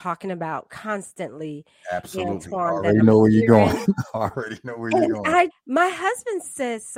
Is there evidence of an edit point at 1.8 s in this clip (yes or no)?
no